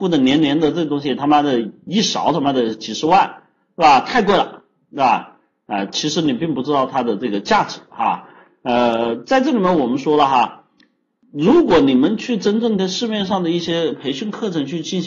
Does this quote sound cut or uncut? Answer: uncut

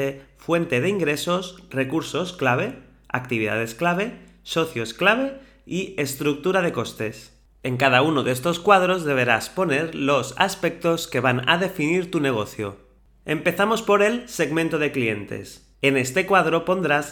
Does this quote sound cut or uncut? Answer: uncut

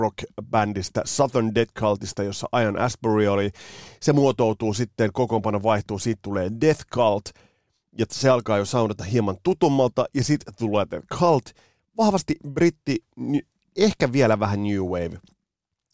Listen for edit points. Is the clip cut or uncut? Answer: uncut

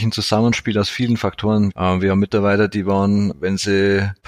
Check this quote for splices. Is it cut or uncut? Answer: cut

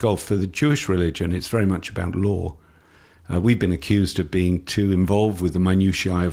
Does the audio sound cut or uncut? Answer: uncut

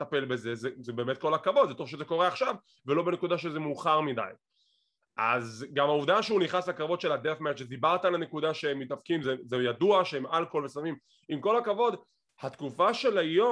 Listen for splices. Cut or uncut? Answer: uncut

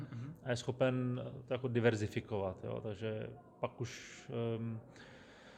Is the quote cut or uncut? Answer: uncut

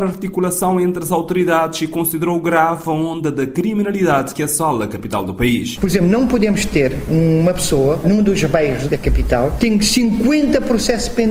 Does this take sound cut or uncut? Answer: cut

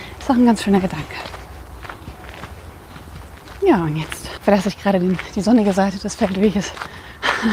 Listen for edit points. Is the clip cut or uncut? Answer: cut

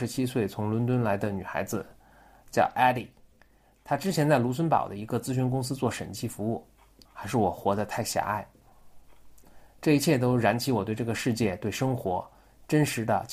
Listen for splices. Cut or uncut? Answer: cut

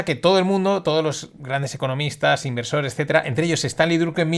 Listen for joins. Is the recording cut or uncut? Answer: uncut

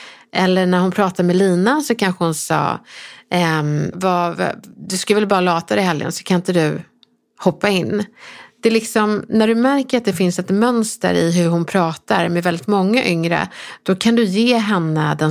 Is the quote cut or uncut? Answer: cut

